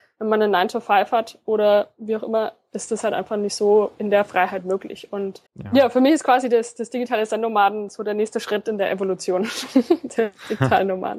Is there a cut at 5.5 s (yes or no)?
yes